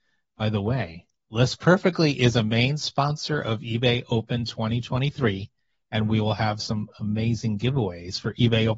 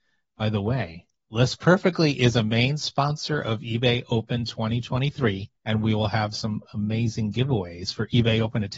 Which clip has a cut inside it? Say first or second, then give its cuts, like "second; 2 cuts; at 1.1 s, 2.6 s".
second; 1 cut; at 5.6 s